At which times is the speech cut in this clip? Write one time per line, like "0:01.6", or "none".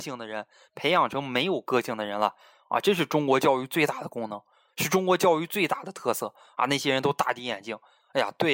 none